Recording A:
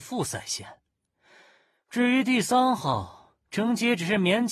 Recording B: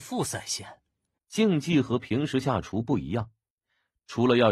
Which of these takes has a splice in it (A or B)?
B